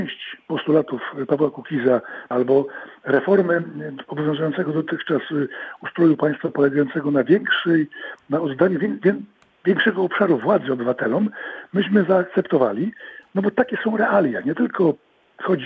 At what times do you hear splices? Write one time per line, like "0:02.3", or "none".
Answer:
0:02.3